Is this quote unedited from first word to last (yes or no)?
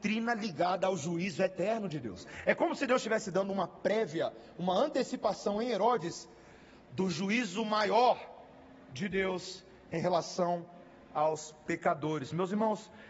yes